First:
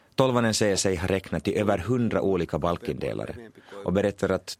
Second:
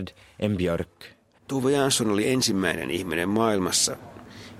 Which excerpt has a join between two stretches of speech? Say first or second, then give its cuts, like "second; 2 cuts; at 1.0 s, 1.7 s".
second; 1 cut; at 1.4 s